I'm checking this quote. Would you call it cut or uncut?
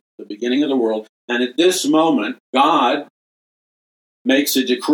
cut